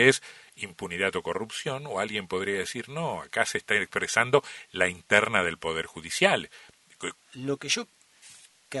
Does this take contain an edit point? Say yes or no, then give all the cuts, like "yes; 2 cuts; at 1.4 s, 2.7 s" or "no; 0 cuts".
yes; 1 cut; at 7.1 s